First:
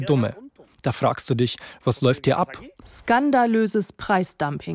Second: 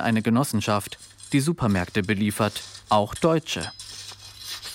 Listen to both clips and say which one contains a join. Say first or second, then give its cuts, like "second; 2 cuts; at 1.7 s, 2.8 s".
first; 1 cut; at 2.8 s